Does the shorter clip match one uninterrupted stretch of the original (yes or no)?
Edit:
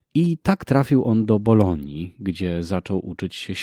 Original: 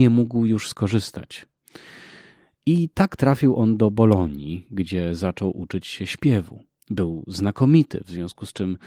yes